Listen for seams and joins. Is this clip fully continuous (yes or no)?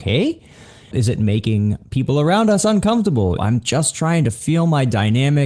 no